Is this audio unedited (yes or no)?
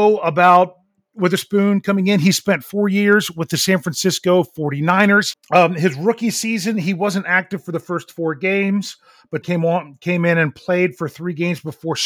no